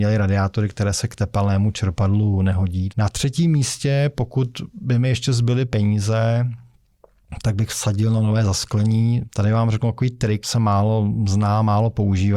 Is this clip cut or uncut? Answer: cut